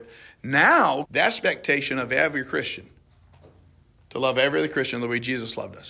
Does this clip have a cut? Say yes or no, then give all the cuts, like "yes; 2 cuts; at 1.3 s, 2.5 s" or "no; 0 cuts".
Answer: yes; 1 cut; at 1.0 s